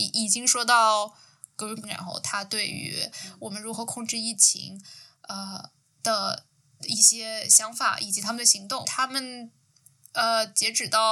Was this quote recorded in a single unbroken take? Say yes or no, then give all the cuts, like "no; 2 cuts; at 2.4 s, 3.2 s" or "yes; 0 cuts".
no; 2 cuts; at 1.8 s, 8.8 s